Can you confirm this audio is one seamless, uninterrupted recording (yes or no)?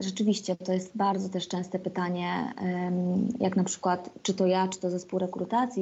no